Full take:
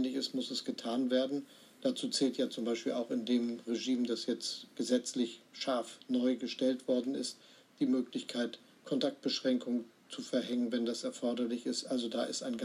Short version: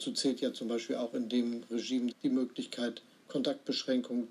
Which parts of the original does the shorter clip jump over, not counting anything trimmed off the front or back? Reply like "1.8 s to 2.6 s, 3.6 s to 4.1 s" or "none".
4.1 s to 7.7 s